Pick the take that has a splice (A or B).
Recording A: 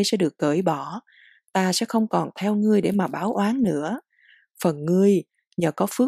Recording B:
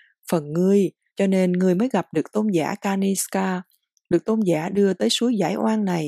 B